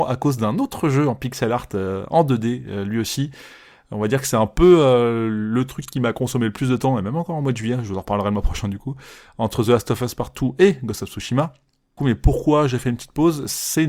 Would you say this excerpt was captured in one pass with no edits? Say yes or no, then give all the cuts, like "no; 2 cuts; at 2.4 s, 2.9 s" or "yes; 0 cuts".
no; 1 cut; at 12.0 s